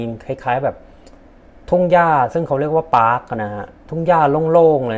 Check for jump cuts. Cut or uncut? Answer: cut